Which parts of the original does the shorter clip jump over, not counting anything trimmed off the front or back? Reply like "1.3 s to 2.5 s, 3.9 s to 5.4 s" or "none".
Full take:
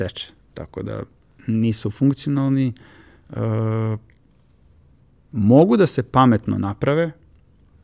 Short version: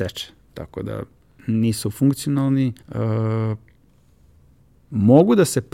2.8 s to 3.2 s